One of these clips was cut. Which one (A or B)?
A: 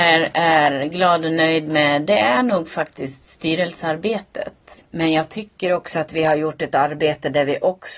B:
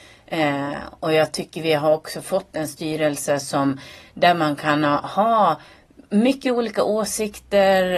A